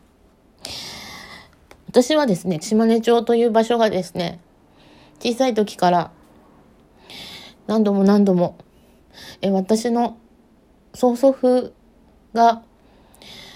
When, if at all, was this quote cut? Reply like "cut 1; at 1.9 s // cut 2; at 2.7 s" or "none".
cut 1; at 2.6 s